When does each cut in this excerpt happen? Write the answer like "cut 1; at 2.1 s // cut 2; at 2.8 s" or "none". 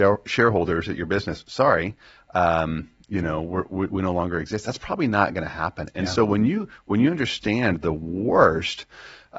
none

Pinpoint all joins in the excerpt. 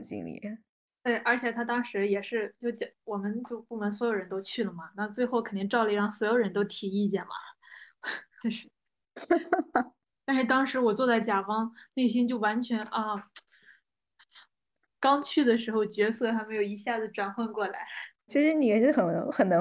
cut 1; at 8.4 s // cut 2; at 14.8 s // cut 3; at 18.3 s

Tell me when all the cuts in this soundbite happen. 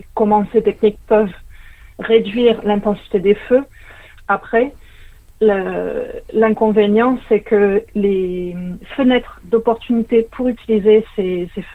cut 1; at 4.2 s

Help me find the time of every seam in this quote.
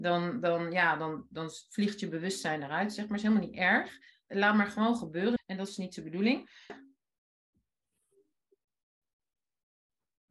cut 1; at 5.4 s // cut 2; at 6.7 s

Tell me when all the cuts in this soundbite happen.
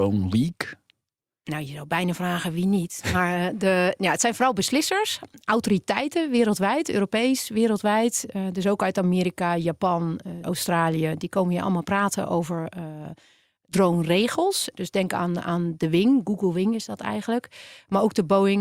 cut 1; at 10.4 s // cut 2; at 14.7 s

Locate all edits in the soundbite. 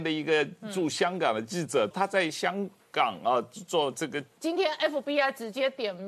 cut 1; at 1.9 s // cut 2; at 4.4 s

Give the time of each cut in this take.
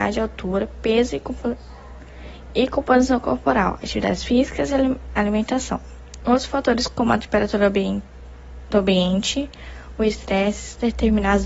none

